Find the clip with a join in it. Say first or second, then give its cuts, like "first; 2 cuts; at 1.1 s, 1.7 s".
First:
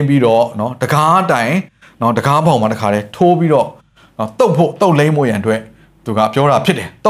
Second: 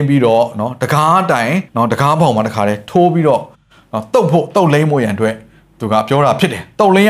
second; 1 cut; at 1.7 s